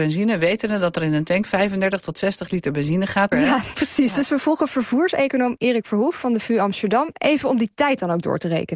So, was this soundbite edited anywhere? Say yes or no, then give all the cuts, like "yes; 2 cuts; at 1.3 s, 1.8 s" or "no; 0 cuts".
yes; 1 cut; at 3.3 s